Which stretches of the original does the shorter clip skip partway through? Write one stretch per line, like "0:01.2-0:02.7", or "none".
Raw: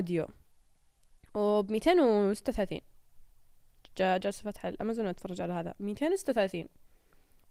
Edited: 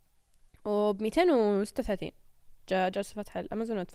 0:03.3-0:03.9